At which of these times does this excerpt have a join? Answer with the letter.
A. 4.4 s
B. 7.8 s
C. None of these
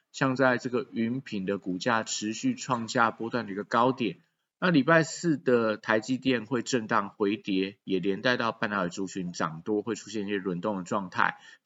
A